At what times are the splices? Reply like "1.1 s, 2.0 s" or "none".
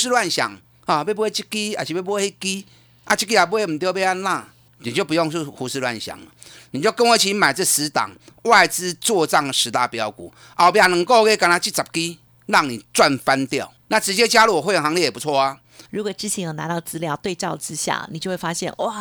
13.8 s, 15.9 s